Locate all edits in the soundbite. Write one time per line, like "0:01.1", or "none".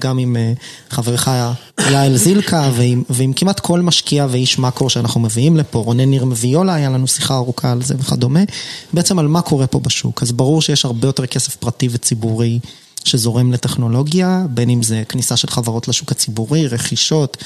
0:01.7